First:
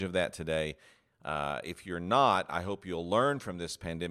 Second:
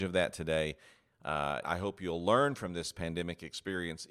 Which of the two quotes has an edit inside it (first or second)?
second